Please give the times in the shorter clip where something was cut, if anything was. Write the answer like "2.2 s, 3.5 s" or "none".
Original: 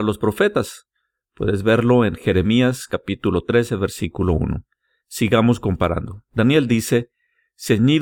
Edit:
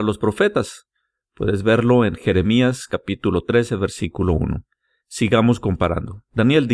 none